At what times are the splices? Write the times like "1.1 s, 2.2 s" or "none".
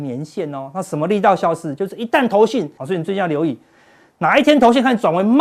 2.8 s